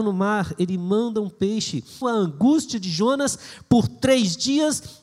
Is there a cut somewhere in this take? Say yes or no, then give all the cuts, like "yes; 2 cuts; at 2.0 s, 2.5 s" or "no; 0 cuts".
yes; 1 cut; at 2.0 s